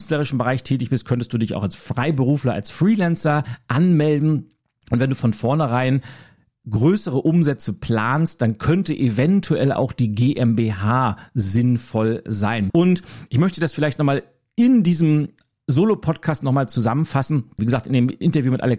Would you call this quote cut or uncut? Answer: cut